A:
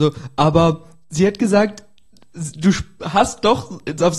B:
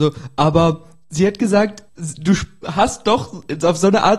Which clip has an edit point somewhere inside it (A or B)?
B